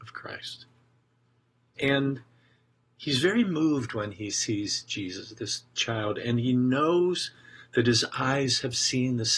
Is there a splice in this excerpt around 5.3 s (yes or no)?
no